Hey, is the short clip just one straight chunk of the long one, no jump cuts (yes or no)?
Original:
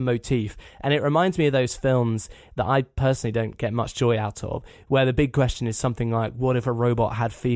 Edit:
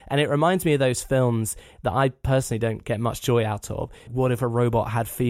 no